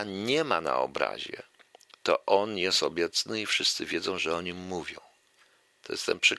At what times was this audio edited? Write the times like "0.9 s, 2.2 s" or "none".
none